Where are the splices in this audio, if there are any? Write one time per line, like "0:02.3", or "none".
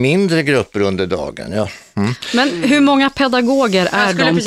none